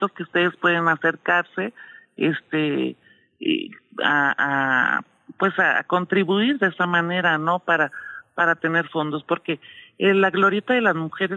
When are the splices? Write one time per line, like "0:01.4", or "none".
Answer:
none